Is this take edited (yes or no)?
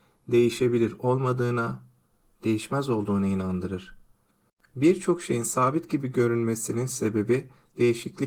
no